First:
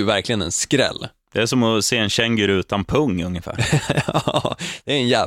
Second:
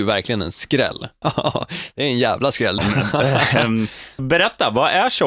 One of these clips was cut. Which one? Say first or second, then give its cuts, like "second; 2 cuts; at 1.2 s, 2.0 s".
second; 3 cuts; at 1.2 s, 2.8 s, 4.2 s